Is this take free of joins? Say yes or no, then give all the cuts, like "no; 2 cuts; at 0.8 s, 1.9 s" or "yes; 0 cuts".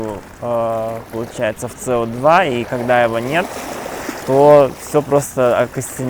no; 1 cut; at 4.2 s